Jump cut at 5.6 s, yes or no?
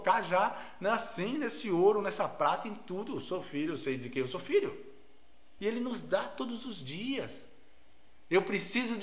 yes